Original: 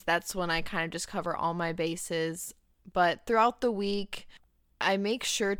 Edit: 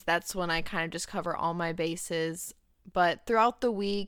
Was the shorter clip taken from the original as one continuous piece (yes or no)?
yes